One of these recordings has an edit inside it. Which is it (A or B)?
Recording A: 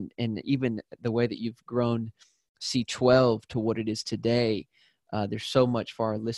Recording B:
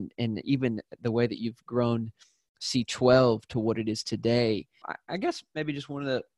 B